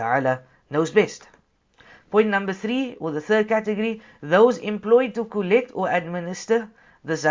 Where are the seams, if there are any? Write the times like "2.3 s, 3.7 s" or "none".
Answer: none